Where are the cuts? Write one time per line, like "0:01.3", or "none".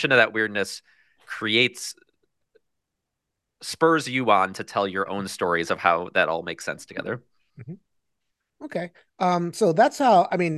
none